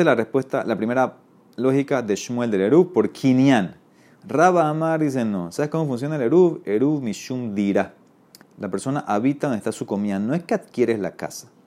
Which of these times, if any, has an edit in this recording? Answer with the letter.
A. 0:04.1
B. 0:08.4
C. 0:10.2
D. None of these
B